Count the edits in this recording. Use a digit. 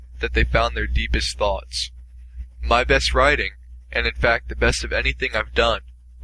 0